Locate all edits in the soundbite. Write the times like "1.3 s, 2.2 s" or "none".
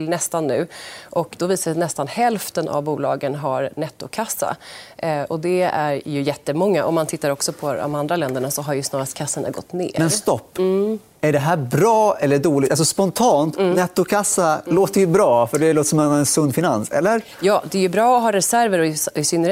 none